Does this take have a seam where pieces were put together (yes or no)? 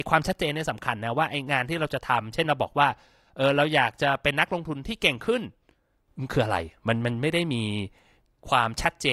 no